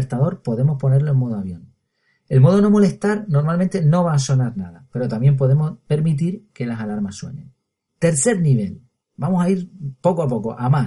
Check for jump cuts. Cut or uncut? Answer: uncut